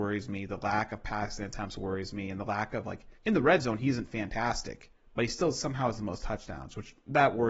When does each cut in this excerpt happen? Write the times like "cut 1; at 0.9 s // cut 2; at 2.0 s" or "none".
cut 1; at 3.2 s